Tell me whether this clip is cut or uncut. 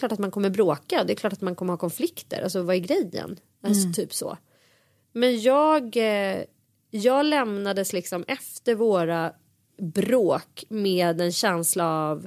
uncut